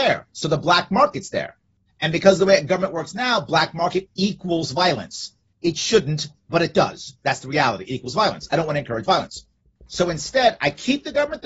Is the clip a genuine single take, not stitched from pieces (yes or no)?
yes